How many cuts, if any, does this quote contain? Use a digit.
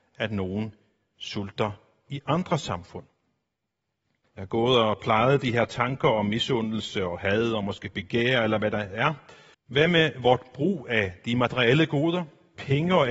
2